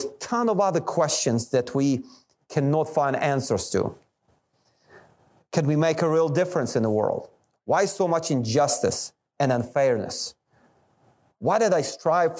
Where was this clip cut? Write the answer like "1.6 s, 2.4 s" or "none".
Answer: none